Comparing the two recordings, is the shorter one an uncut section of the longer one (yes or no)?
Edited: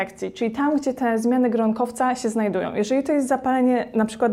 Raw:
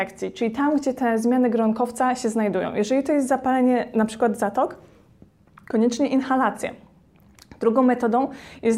yes